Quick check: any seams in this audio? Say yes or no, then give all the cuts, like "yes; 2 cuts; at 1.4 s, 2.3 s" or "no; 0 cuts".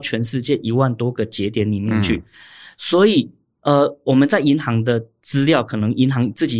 no; 0 cuts